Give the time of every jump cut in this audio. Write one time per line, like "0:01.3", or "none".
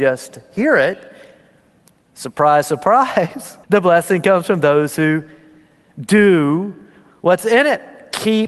0:03.6